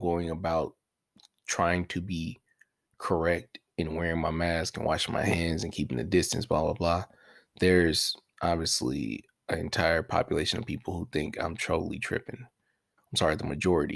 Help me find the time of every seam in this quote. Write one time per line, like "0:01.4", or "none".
0:13.0

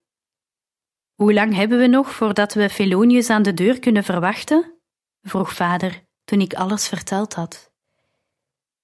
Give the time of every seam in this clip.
0:01.0

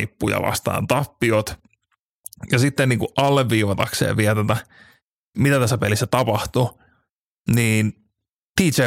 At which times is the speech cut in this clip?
none

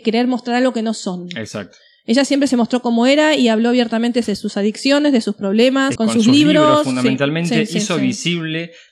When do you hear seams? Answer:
0:06.0

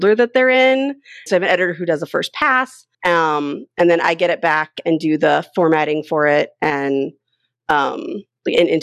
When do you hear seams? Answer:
0:01.3
0:02.9

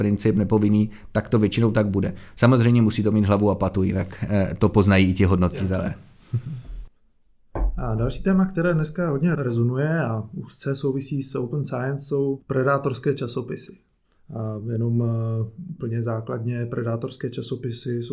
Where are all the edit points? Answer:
none

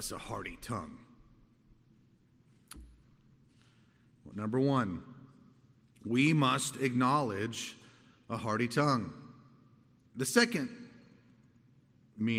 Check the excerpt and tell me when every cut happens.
0:04.3
0:10.1

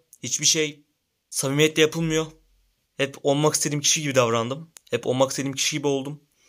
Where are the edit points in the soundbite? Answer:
0:02.8

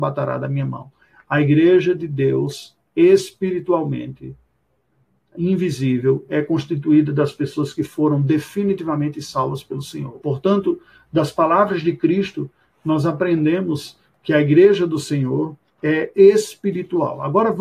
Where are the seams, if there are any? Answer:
0:10.2

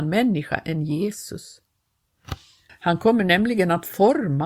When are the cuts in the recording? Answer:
0:02.7

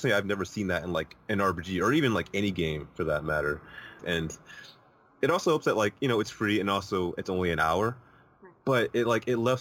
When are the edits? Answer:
0:04.0

